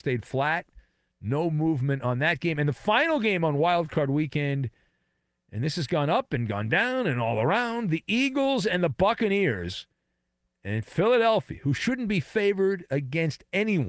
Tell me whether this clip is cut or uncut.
uncut